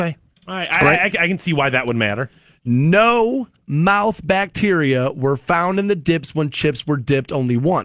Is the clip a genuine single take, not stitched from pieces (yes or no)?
yes